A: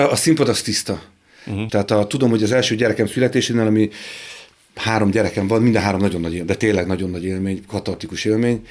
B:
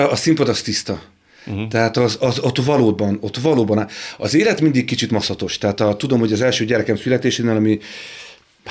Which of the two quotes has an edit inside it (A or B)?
A